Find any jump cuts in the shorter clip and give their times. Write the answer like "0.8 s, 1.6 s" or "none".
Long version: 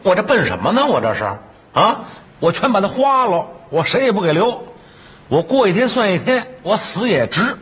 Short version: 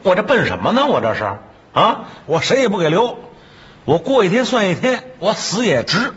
2.3 s